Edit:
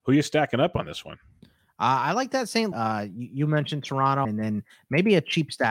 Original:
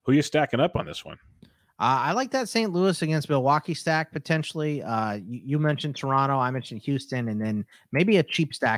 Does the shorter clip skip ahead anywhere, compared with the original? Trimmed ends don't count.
yes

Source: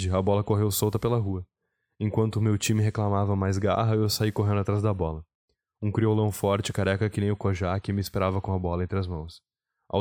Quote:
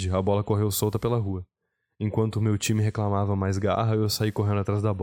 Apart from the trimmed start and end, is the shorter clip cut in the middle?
no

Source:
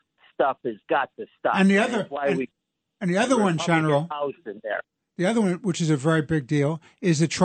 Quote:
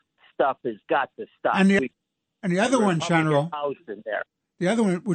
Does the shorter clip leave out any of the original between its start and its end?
yes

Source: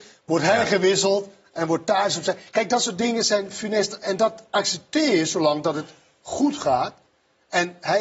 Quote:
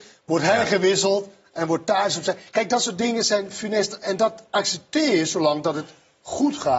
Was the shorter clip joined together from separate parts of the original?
no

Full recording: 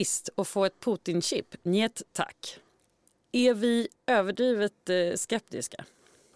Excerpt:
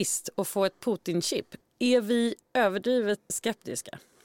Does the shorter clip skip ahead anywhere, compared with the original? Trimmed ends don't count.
yes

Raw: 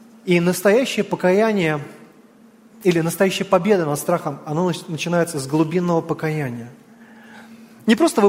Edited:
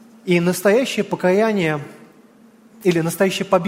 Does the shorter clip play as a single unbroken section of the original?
yes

